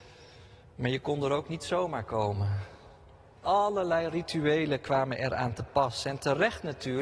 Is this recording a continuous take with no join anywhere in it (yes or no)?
no